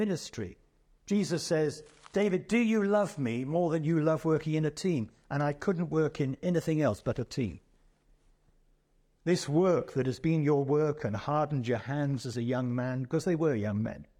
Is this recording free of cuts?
no; 1 cut; at 9.2 s

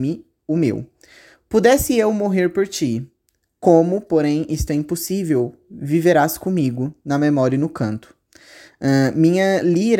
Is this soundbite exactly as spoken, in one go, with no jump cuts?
yes; 0 cuts

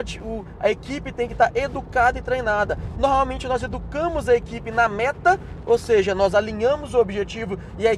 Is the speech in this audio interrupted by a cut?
no; 0 cuts

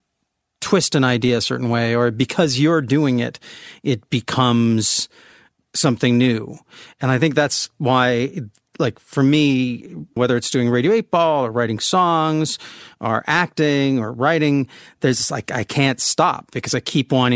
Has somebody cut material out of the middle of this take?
yes; 1 cut; at 10.2 s

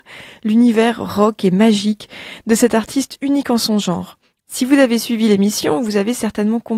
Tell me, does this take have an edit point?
yes; 1 cut; at 4.4 s

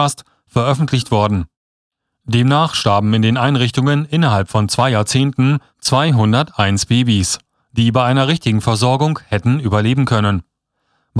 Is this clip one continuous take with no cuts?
yes; 0 cuts

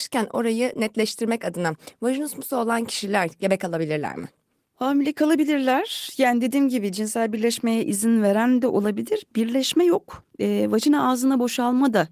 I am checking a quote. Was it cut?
no; 0 cuts

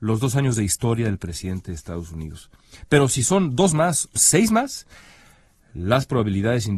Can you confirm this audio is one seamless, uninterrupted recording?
no; 1 cut; at 4.2 s

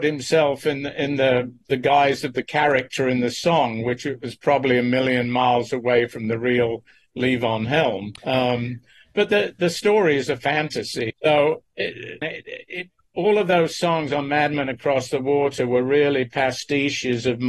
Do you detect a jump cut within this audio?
yes; 3 cuts; at 8.2 s, 11.1 s, 12.2 s

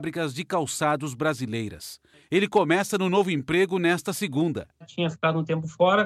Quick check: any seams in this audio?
yes; 1 cut; at 2.1 s

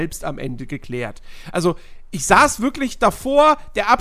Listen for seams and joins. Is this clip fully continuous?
yes; 0 cuts

